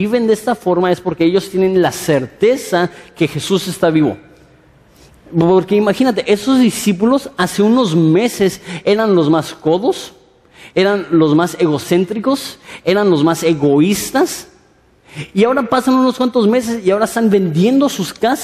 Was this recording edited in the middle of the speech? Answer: no; 0 cuts

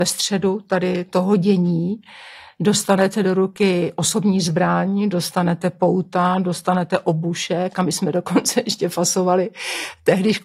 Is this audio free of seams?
yes; 0 cuts

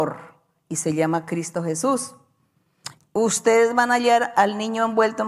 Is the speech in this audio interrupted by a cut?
yes; 1 cut; at 3.0 s

